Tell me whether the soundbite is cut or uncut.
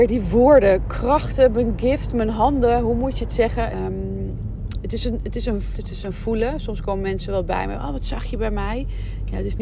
cut